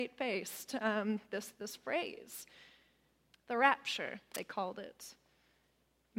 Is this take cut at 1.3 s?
no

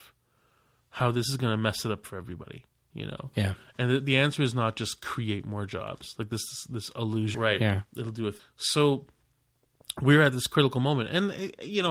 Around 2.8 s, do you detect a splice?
no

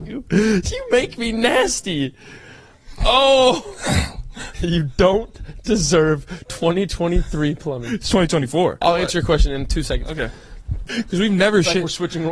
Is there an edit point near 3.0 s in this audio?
no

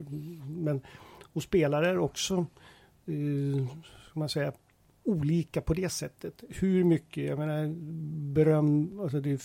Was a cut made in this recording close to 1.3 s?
no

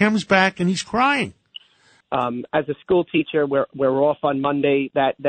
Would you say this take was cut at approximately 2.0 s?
yes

